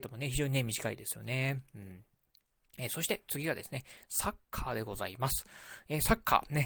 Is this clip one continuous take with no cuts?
yes; 0 cuts

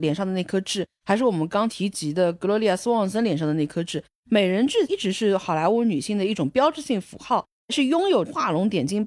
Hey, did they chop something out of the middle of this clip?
no; 0 cuts

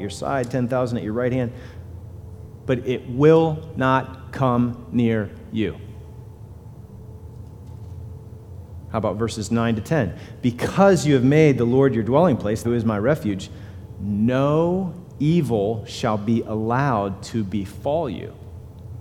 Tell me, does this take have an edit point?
yes; 1 cut; at 12.6 s

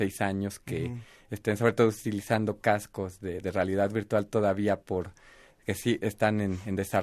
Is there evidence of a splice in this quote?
no; 0 cuts

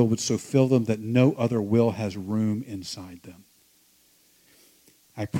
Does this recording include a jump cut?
no; 0 cuts

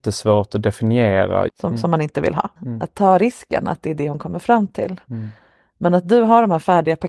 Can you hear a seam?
yes; 2 cuts; at 1.5 s, 2.6 s

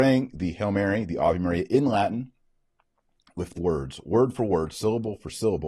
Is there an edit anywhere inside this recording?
yes; 1 cut; at 3.6 s

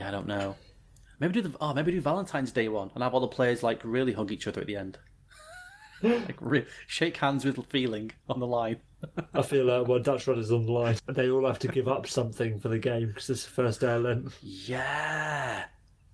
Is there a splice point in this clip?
yes; 2 cuts; at 8.2 s, 11.0 s

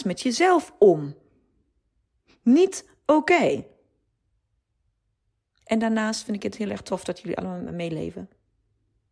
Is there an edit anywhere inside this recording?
no; 0 cuts

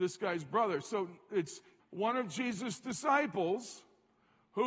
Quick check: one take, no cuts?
no; 1 cut; at 1.8 s

